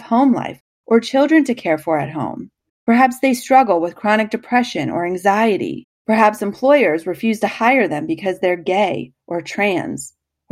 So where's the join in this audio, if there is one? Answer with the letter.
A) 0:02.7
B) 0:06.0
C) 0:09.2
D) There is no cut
A